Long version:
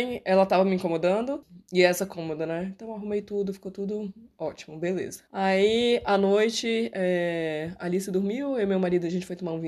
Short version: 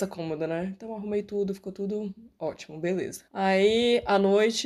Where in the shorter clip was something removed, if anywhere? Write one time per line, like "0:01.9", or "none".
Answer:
none